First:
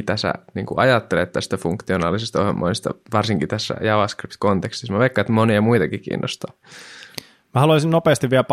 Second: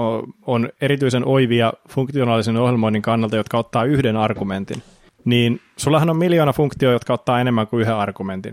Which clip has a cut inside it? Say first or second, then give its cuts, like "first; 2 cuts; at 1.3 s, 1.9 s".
second; 1 cut; at 5.1 s